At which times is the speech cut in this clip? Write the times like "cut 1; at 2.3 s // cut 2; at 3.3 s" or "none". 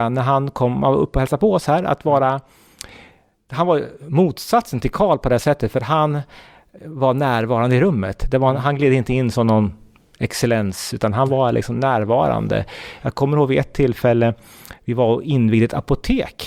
none